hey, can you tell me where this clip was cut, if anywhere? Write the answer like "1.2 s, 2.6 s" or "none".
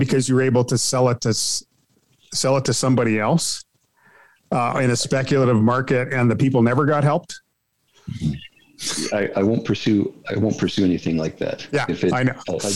none